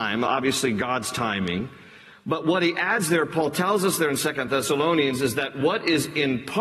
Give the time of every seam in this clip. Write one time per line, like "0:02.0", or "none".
none

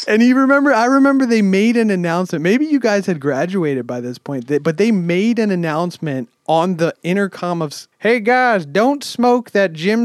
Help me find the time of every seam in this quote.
0:07.9

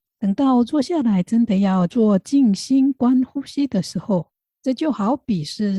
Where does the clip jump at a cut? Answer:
0:04.4

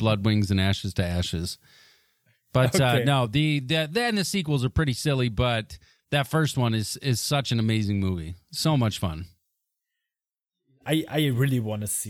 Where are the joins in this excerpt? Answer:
none

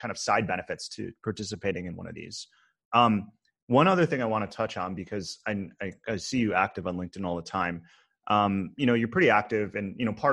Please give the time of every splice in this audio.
none

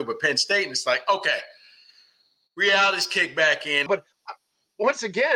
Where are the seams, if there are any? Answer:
0:03.9

